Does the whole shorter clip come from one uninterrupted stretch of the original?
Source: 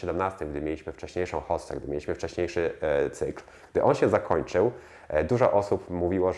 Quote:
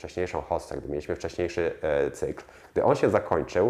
yes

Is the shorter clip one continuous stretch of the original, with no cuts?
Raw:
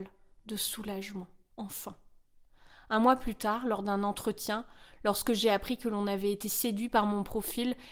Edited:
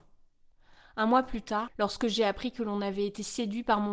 no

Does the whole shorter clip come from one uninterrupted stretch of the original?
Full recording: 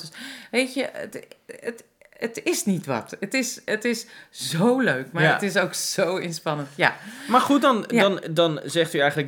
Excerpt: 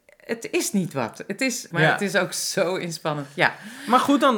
no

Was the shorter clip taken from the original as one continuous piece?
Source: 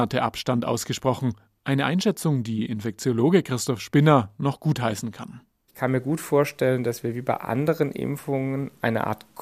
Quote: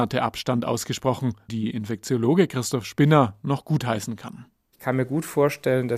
no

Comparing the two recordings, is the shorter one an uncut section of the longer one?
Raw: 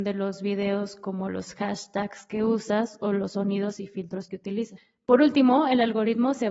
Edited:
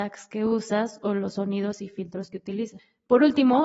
yes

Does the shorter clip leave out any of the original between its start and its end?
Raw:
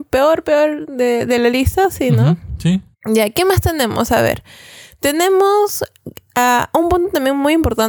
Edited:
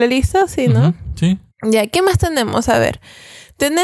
no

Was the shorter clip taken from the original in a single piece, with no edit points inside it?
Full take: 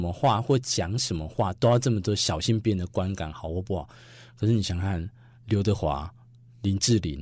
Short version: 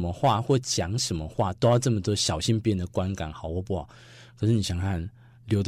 yes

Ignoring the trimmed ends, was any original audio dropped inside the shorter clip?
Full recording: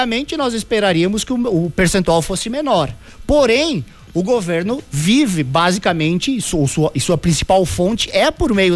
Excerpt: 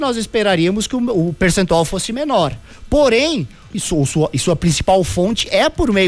yes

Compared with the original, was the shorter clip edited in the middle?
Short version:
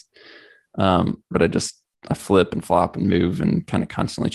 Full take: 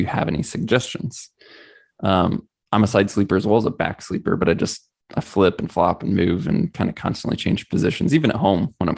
yes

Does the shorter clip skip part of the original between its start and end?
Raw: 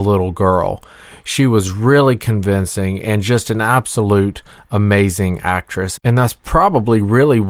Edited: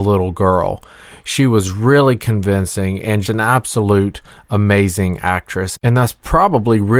yes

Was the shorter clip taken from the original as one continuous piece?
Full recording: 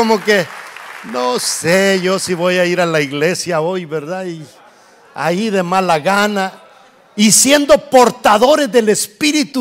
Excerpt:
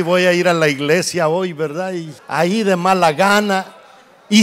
no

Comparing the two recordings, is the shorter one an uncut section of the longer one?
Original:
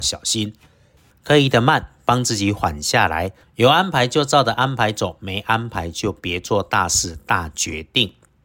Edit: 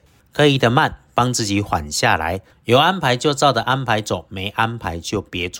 yes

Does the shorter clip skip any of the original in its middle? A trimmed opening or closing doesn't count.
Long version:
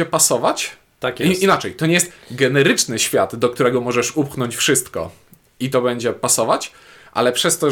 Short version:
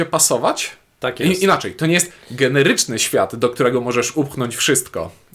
no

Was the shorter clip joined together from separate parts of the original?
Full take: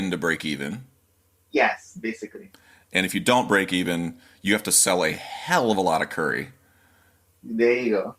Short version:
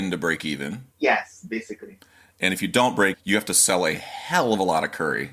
yes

